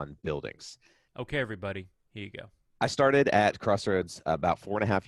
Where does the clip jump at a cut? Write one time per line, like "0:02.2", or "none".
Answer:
0:01.1